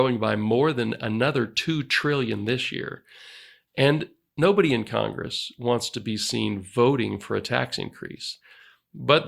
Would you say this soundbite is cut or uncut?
uncut